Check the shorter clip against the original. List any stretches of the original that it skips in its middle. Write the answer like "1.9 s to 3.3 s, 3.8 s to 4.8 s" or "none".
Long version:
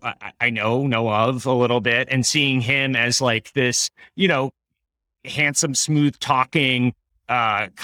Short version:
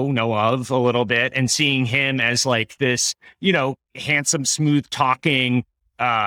4.6 s to 5.1 s